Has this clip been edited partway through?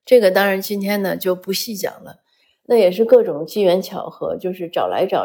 no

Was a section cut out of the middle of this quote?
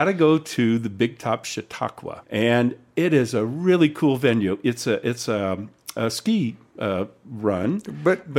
yes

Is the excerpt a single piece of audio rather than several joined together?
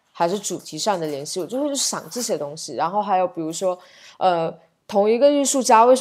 yes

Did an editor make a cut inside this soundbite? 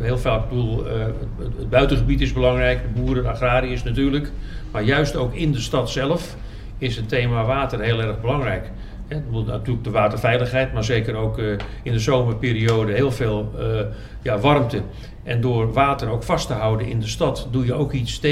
no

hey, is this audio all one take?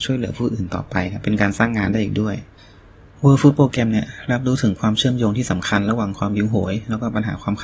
yes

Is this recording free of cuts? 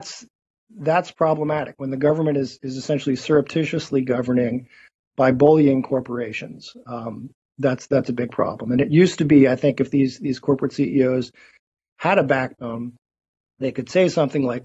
yes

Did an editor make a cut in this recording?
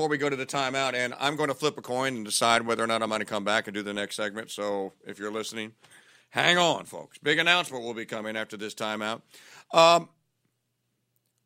no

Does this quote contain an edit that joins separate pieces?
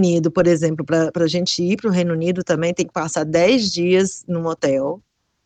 no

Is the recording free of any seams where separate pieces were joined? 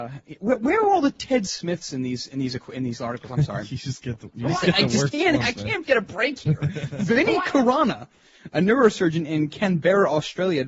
yes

